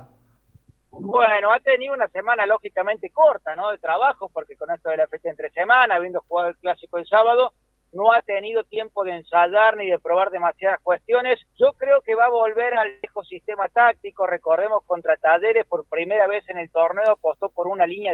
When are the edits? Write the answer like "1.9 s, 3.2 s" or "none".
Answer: 11.5 s